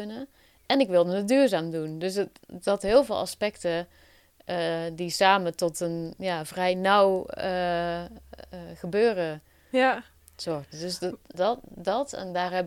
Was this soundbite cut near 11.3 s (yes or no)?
yes